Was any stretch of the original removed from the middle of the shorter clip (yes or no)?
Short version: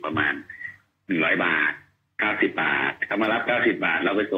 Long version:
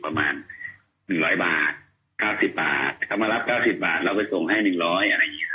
no